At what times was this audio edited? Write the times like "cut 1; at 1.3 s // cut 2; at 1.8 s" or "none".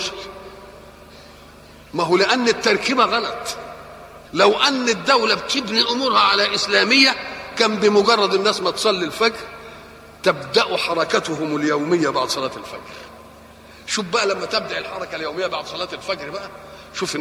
cut 1; at 4.2 s